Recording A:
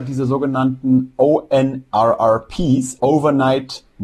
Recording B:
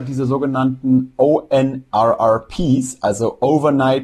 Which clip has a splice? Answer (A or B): A